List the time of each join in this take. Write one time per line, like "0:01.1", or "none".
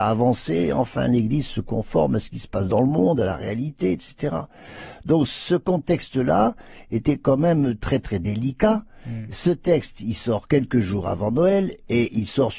none